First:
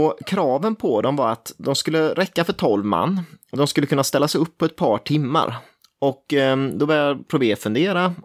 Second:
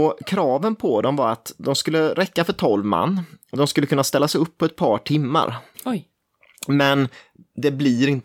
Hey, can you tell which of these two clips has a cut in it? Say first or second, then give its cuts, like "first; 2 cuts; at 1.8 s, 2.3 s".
second; 1 cut; at 5.7 s